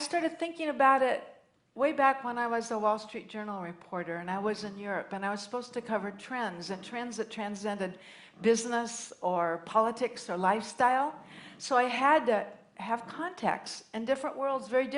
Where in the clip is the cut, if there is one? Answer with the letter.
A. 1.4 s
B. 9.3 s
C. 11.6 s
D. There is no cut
D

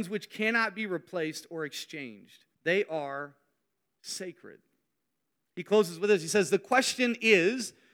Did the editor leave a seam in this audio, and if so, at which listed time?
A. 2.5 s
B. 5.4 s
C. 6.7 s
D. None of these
A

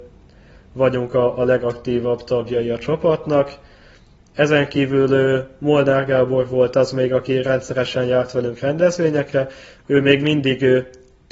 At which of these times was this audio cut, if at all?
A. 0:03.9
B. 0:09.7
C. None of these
C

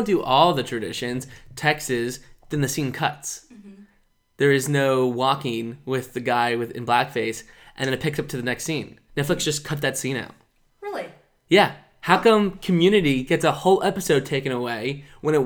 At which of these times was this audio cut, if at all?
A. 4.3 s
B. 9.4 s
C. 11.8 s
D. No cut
D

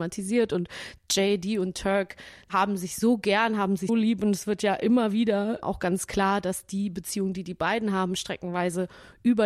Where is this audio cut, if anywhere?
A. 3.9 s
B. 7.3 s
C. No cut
A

